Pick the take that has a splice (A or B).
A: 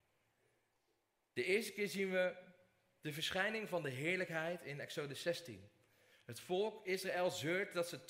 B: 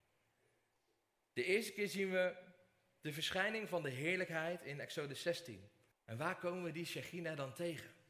B